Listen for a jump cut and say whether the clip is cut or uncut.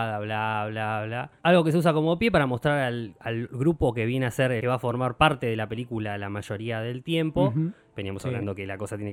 cut